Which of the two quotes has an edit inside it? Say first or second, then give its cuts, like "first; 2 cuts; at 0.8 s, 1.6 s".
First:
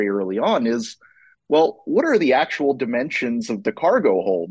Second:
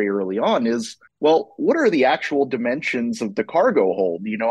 second; 1 cut; at 1.1 s